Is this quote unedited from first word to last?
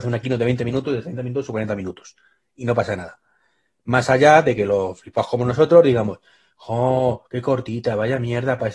yes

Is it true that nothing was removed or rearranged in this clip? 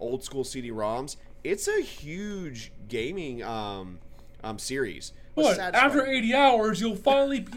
no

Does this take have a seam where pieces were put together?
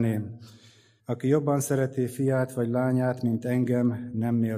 yes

